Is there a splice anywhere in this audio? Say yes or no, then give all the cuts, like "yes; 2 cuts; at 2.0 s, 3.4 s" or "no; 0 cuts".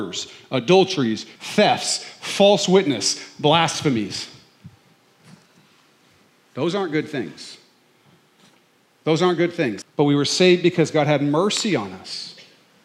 yes; 2 cuts; at 1.4 s, 9.8 s